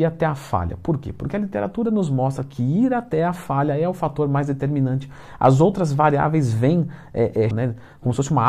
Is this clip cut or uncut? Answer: cut